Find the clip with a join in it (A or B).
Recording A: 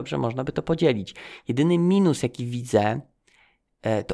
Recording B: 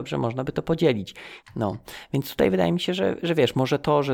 B